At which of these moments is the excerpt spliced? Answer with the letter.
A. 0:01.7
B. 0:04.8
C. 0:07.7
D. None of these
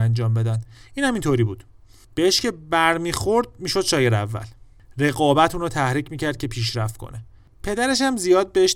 D